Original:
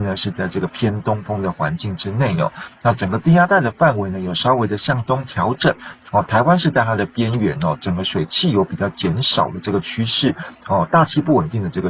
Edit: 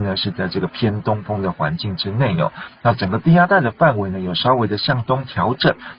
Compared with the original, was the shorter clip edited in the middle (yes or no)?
no